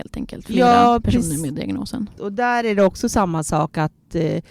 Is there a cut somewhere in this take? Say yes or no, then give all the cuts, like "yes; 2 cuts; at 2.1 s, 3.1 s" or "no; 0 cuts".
yes; 1 cut; at 2.2 s